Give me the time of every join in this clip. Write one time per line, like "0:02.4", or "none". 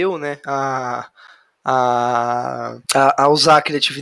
0:02.8

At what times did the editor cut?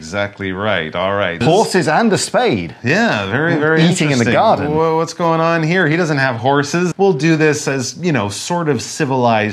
0:01.4
0:06.9

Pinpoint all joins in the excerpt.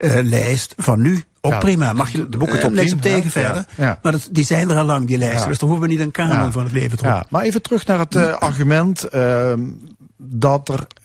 none

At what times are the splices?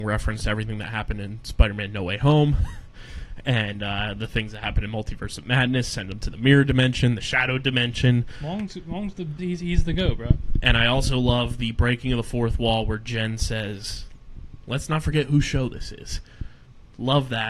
0:09.4

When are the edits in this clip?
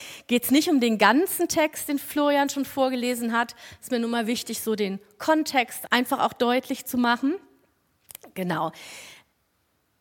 0:05.9

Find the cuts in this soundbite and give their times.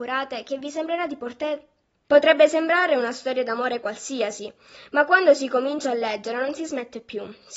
0:02.0

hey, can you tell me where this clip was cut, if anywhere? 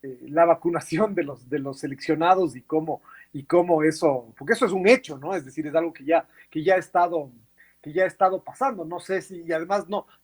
none

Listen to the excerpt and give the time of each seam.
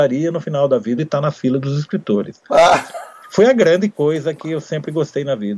0:01.0

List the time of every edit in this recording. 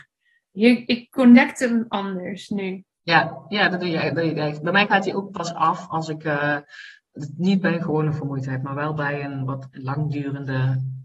none

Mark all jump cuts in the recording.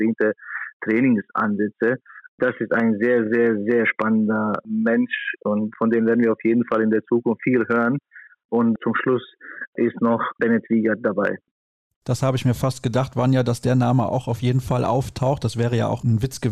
none

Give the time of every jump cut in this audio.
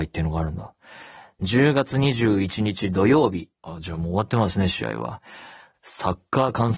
0:03.5
0:05.7

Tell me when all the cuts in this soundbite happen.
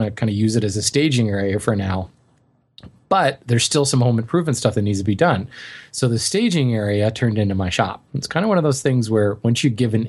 0:08.1

